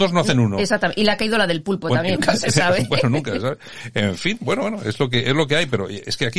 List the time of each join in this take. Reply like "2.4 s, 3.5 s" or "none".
2.2 s